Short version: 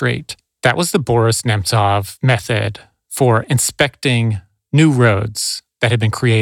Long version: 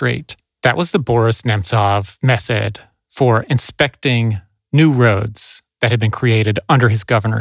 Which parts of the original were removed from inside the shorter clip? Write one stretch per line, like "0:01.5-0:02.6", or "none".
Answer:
none